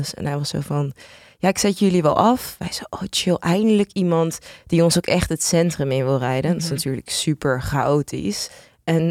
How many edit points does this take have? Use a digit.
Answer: 0